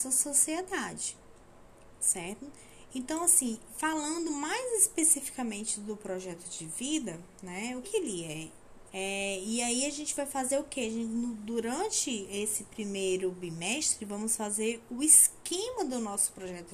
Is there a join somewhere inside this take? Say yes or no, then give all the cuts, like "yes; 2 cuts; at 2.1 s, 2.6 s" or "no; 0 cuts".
yes; 2 cuts; at 7.8 s, 8.9 s